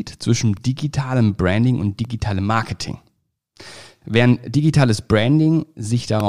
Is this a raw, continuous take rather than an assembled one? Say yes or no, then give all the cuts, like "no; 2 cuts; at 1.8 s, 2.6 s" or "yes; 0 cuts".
no; 1 cut; at 4.0 s